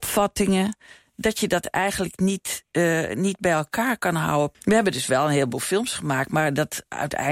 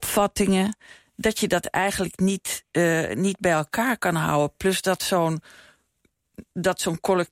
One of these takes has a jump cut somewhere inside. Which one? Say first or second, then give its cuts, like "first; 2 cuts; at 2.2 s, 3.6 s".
first; 1 cut; at 4.5 s